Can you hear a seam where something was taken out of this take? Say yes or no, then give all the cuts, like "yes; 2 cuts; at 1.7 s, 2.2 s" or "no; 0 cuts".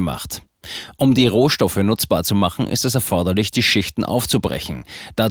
no; 0 cuts